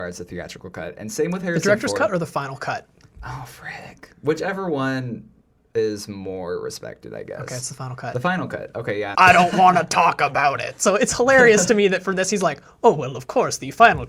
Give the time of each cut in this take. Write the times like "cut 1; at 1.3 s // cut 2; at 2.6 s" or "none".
cut 1; at 9.1 s